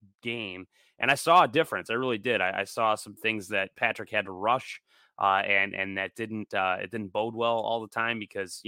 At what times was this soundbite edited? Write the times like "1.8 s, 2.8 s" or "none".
none